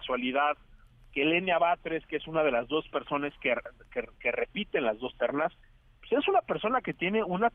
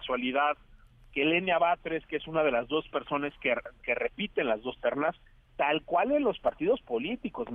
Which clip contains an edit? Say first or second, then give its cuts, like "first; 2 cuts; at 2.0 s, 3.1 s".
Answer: second; 2 cuts; at 3.8 s, 5.5 s